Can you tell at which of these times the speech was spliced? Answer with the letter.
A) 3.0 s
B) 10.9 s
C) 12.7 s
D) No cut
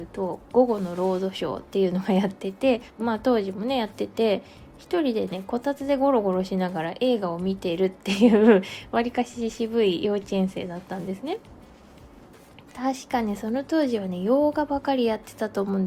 A